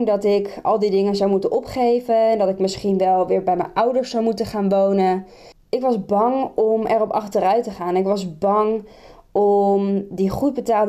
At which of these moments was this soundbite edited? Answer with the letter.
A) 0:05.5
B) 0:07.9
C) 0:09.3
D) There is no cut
A